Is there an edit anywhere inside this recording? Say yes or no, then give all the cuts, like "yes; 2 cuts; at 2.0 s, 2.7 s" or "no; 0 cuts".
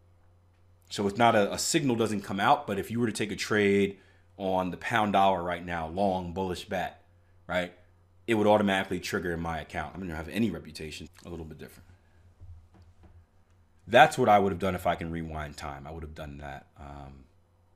yes; 2 cuts; at 9.9 s, 11.1 s